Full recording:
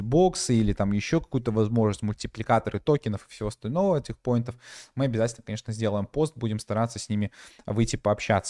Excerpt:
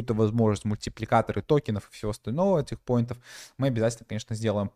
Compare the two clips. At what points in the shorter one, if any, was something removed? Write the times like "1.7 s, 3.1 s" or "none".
none